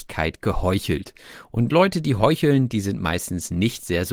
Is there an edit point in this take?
no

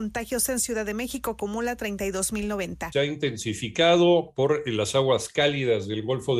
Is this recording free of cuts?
no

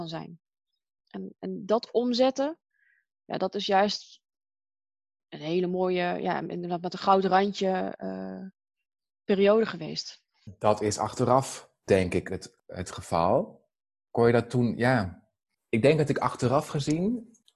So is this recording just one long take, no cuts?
yes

